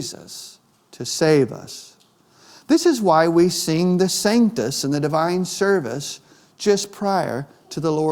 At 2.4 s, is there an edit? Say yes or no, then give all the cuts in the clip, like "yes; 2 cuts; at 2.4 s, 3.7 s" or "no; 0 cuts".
no; 0 cuts